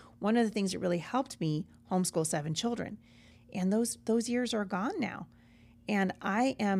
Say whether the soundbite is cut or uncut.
cut